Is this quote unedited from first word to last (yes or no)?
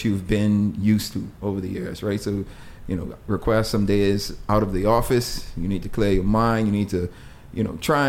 yes